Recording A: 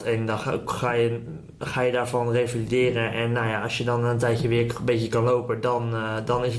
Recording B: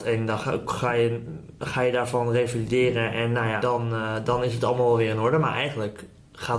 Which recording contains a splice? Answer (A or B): B